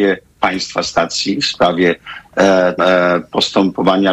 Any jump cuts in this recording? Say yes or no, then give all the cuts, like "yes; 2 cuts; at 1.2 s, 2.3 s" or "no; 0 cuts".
yes; 1 cut; at 2.8 s